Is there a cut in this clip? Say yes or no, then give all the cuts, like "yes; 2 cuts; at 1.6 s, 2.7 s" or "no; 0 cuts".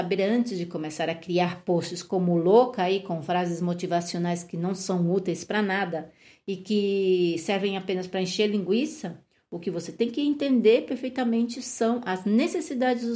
no; 0 cuts